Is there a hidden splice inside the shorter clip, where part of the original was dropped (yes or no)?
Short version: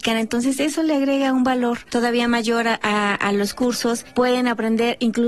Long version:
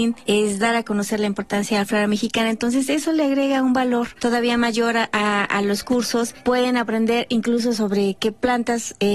no